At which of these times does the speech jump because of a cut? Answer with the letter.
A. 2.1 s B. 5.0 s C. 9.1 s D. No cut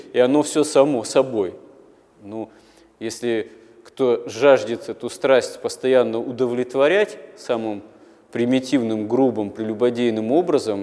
A